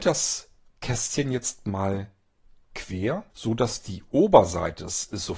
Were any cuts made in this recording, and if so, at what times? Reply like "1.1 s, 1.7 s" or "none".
3.3 s